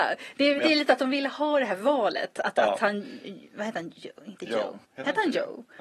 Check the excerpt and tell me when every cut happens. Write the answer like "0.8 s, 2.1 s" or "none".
4.8 s